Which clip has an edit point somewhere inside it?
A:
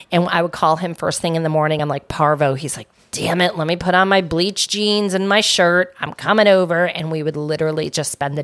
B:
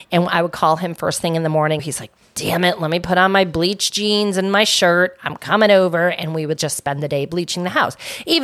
B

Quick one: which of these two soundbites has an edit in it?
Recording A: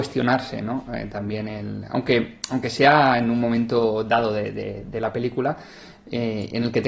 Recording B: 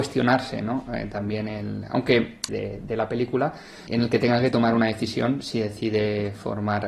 B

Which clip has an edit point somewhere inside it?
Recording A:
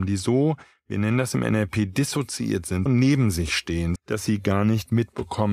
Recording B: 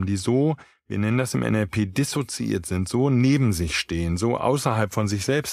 A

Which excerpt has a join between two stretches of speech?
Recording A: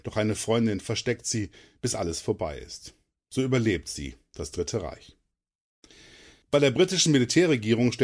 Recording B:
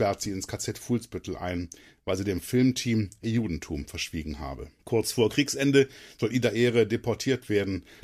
B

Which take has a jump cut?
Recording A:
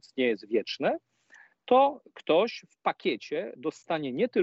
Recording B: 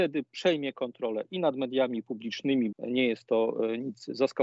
B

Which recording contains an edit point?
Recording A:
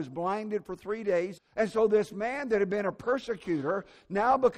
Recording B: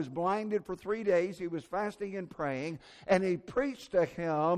A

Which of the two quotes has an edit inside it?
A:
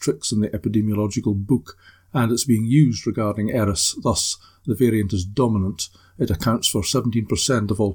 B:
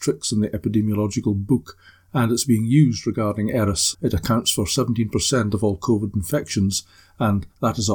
B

